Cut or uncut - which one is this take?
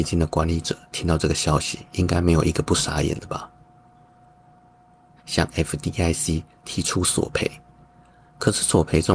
cut